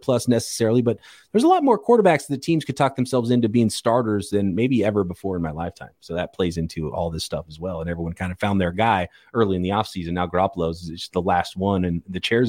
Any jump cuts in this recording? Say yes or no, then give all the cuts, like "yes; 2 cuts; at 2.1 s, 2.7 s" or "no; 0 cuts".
no; 0 cuts